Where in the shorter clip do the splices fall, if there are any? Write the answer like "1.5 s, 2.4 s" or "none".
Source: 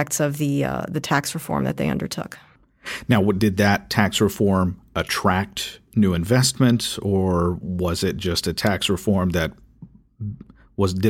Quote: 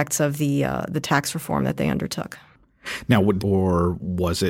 3.4 s